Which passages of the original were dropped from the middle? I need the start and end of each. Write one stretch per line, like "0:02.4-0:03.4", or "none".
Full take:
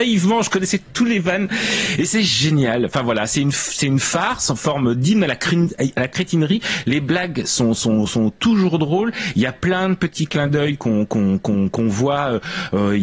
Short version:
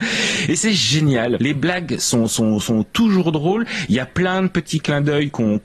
0:02.9-0:06.8